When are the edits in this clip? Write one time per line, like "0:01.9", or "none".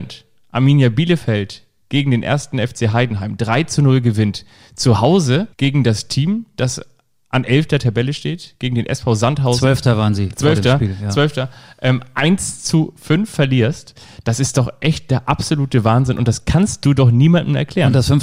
0:05.5